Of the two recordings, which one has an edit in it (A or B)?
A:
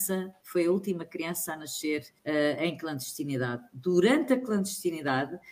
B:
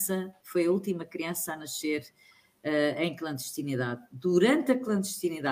A